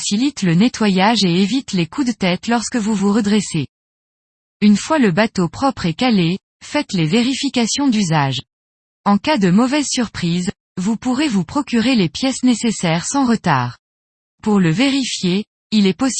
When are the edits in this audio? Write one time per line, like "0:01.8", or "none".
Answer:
0:14.3

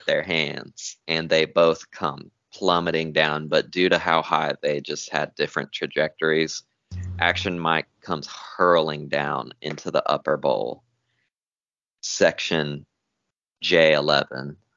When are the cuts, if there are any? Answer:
0:01.0

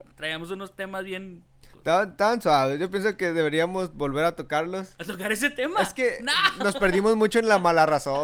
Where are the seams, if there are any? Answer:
0:01.7

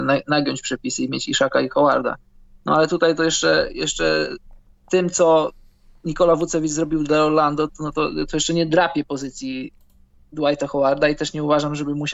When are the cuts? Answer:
none

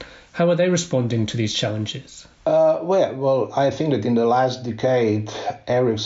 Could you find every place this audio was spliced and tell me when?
0:02.3

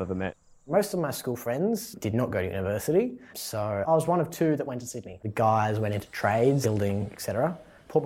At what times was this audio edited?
0:05.2
0:06.6

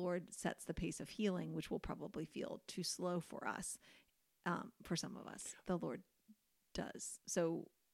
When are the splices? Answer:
0:05.6

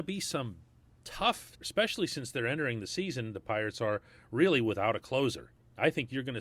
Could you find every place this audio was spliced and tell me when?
0:01.6

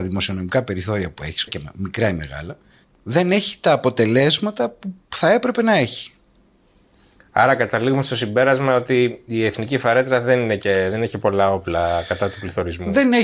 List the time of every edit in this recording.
0:01.5
0:02.8

